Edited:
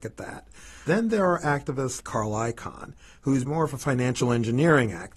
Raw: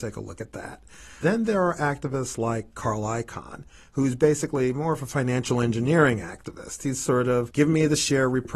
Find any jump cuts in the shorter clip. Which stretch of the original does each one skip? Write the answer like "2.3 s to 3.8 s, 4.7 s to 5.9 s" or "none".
2.4 s to 2.7 s, 4.2 s to 4.7 s